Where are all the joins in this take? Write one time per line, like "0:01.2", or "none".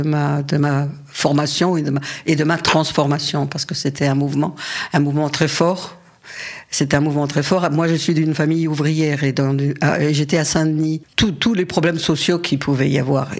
none